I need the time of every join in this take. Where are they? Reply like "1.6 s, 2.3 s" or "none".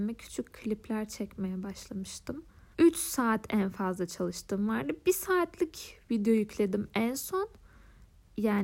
2.7 s

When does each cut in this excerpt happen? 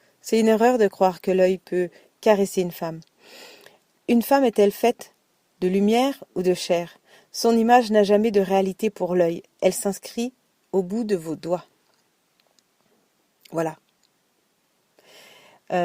none

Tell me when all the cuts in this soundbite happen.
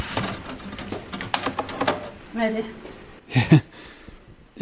2.2 s

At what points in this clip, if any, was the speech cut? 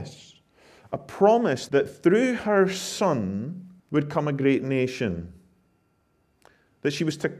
1.7 s, 3.8 s

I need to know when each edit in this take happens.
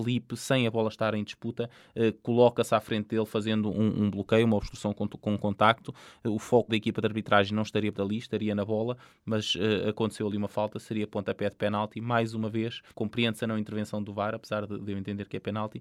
6.7 s, 7.9 s, 12.9 s

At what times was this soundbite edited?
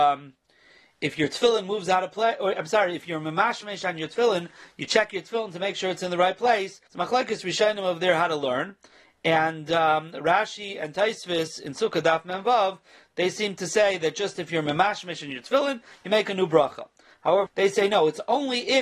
6.9 s, 17.5 s

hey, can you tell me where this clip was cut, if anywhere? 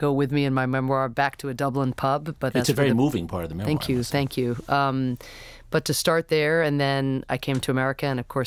none

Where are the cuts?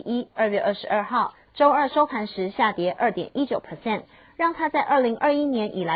1.5 s

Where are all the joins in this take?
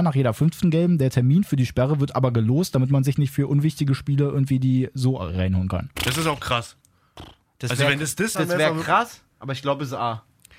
6.0 s, 8.3 s

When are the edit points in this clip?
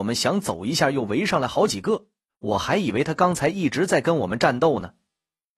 2.3 s

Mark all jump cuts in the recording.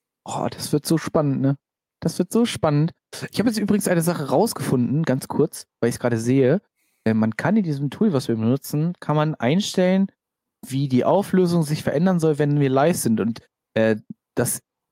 none

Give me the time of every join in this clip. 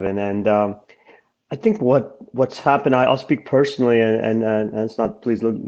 none

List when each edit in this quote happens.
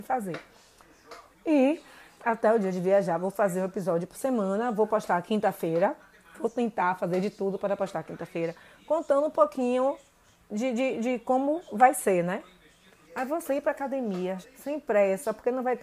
1.3 s, 13.0 s, 14.4 s

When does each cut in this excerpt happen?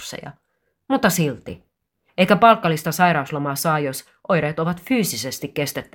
2.1 s

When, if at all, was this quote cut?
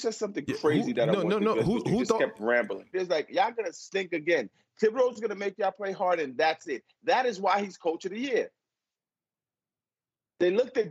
2.9 s

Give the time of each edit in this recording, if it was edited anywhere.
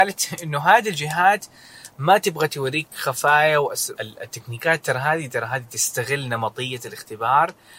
3.9 s

